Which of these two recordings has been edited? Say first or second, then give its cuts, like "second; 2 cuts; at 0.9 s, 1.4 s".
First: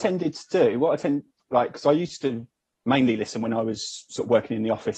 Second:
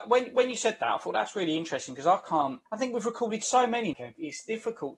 second; 2 cuts; at 2.7 s, 3.9 s